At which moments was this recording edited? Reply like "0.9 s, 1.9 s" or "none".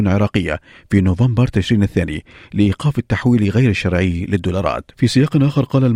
4.9 s